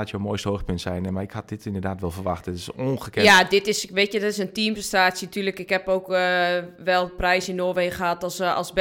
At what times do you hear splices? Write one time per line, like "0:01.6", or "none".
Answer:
none